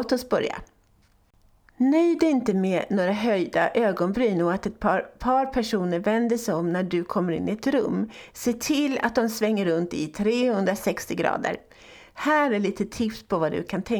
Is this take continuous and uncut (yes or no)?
yes